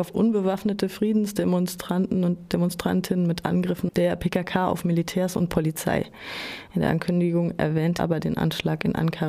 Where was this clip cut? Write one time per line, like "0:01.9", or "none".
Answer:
0:06.7
0:08.0